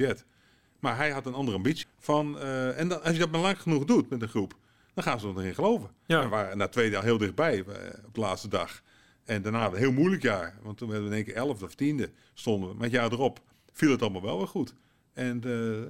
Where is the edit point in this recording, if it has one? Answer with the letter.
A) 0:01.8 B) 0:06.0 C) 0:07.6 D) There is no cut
A